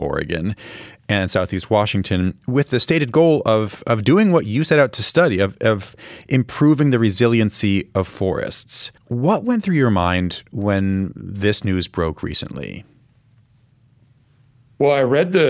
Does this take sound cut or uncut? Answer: cut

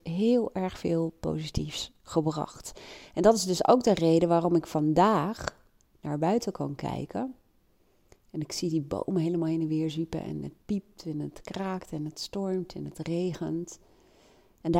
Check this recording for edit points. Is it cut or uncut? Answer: uncut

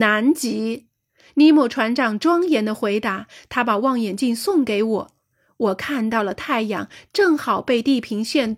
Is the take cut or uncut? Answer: uncut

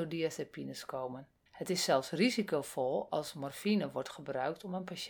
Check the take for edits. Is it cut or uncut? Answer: cut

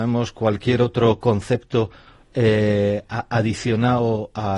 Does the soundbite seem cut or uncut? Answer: uncut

